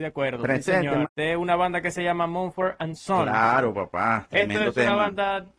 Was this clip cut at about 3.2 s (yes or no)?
no